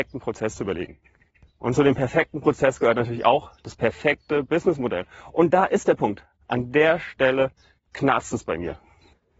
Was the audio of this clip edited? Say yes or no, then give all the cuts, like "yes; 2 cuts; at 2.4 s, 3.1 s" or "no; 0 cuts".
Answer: no; 0 cuts